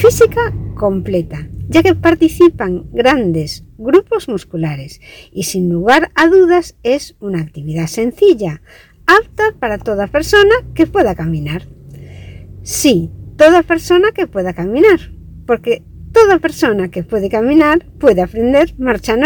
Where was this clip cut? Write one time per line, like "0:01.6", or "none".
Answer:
none